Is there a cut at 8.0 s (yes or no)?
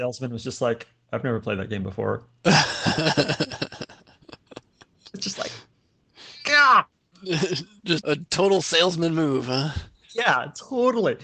yes